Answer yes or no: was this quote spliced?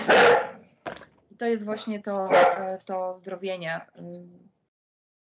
no